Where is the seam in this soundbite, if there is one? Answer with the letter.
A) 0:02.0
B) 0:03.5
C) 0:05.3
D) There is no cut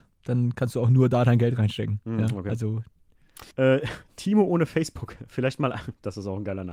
B